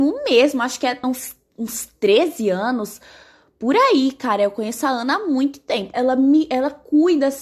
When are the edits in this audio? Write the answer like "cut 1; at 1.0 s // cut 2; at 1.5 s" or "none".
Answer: cut 1; at 1.0 s // cut 2; at 5.9 s